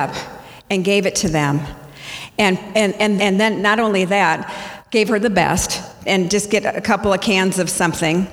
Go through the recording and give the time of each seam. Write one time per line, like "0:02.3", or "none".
0:03.2
0:06.0